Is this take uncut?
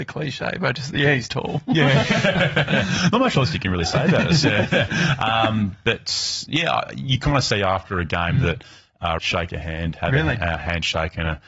no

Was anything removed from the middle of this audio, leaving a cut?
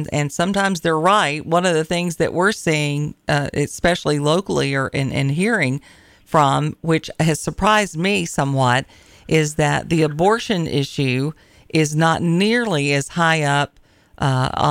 no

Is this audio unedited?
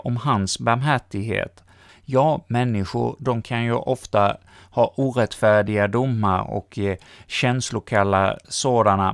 no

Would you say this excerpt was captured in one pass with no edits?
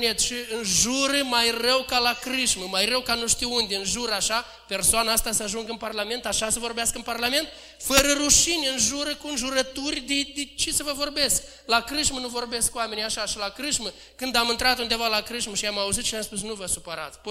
yes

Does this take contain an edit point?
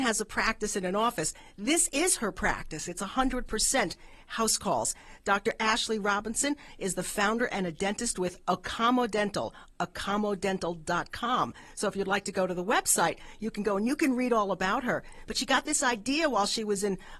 no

